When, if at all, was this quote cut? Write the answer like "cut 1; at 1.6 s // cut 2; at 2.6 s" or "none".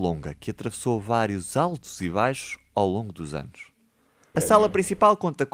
cut 1; at 4.3 s